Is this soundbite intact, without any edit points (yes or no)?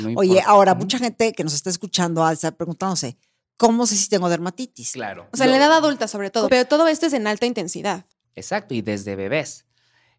no